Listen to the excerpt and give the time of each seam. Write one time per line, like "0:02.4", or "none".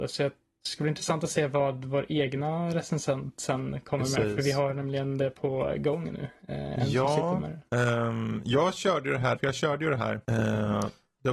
0:09.4